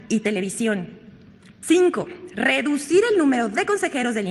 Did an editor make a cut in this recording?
yes; 1 cut; at 1.6 s

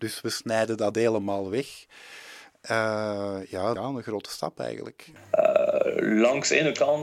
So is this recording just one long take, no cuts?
no; 1 cut; at 3.8 s

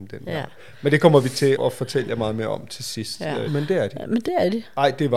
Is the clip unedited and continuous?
no; 2 cuts; at 1.5 s, 3.5 s

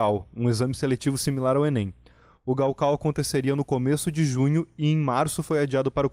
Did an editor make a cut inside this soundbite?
no; 0 cuts

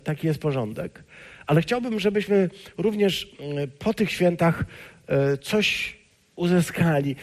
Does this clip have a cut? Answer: no; 0 cuts

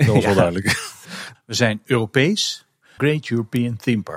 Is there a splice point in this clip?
yes; 2 cuts; at 1.3 s, 3.0 s

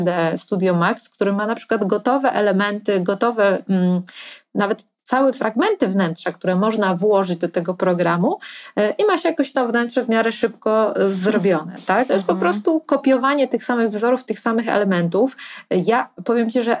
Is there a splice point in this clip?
yes; 1 cut; at 12.1 s

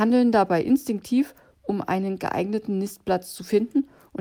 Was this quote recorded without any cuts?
yes; 0 cuts

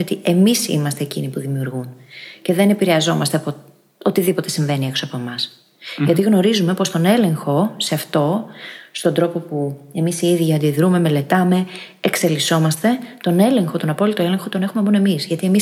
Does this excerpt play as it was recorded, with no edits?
yes; 0 cuts

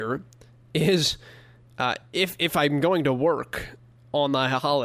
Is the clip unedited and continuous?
yes; 0 cuts

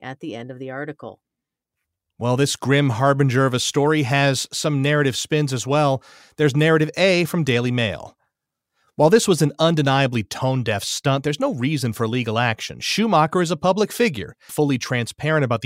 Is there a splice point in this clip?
yes; 1 cut; at 14.5 s

